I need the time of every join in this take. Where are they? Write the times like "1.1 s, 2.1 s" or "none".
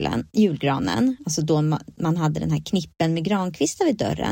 none